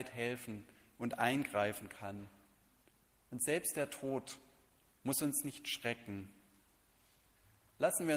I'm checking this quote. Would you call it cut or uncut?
uncut